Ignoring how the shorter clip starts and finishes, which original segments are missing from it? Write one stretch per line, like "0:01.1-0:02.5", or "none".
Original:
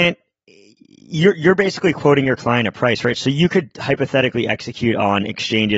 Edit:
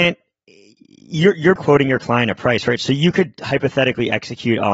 0:01.6-0:01.9